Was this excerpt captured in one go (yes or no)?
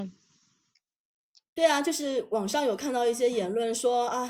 yes